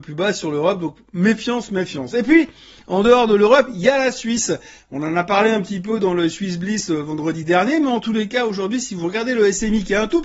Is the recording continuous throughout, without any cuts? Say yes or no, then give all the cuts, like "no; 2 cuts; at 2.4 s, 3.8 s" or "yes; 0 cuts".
yes; 0 cuts